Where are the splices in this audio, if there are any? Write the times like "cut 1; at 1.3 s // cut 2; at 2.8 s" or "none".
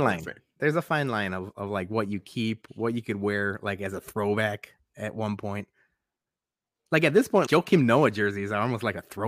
cut 1; at 7.5 s